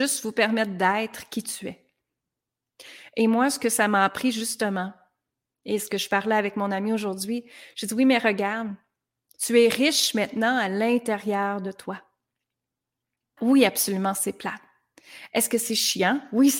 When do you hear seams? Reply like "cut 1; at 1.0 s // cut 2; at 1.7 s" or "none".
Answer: cut 1; at 13.4 s